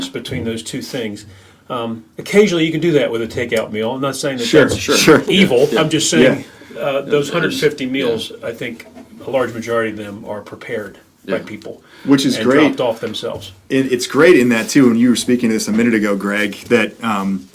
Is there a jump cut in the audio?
no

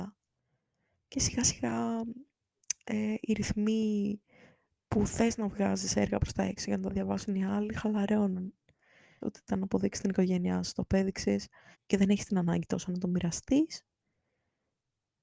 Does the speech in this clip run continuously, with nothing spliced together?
no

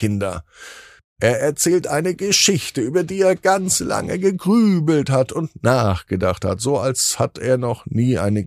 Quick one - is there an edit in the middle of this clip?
no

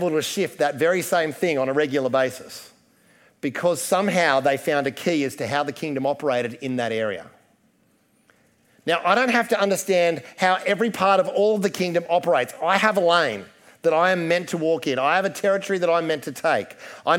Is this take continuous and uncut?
yes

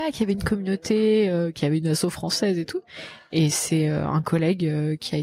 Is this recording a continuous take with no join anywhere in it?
yes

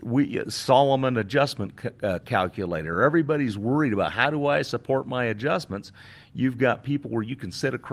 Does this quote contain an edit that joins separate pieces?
no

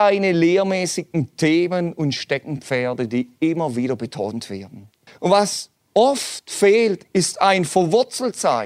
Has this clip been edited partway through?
yes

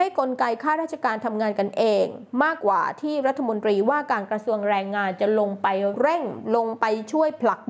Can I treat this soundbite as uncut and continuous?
no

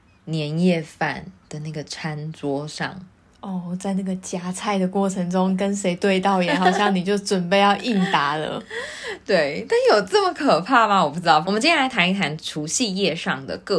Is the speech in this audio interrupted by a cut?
yes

